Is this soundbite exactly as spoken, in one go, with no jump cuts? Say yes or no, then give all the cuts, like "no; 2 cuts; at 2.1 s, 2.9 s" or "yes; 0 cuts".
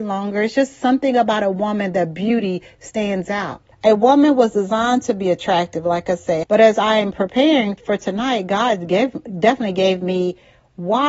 no; 2 cuts; at 3.7 s, 6.4 s